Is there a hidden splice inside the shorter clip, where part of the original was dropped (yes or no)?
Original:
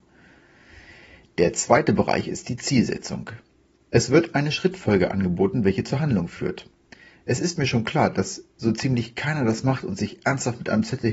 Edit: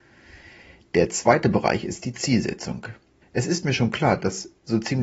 yes